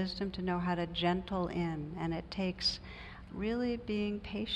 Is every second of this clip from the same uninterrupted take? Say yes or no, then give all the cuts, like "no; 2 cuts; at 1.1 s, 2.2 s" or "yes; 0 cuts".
no; 1 cut; at 3.3 s